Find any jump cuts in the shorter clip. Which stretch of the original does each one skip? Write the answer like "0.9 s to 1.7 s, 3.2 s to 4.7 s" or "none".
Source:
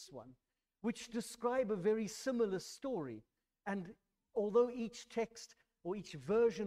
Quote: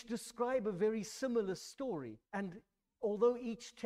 3.3 s to 3.6 s